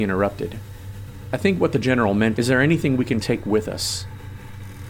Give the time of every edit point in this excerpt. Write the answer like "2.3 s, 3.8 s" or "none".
2.4 s